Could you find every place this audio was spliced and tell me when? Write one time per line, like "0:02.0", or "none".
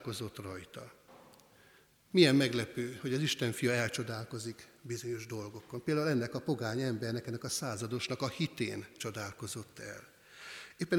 none